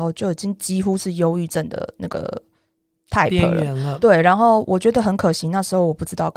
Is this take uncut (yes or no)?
no